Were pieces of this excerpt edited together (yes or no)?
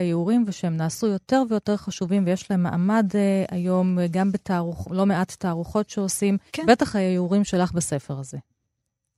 yes